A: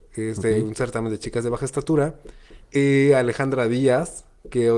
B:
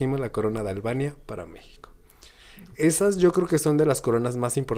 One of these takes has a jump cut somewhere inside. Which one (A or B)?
A